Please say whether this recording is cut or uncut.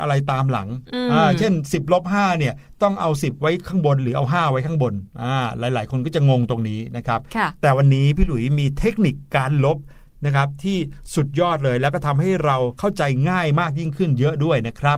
uncut